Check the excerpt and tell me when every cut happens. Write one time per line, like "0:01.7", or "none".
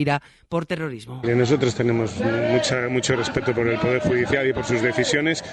none